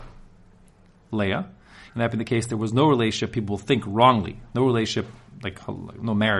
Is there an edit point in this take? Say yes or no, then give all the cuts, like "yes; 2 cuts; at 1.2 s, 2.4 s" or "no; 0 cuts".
yes; 1 cut; at 1.9 s